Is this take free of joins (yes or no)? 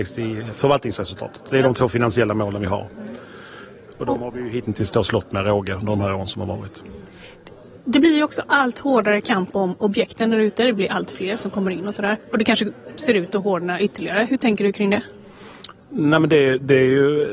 yes